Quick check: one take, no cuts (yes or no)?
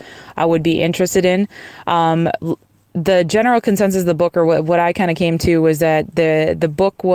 yes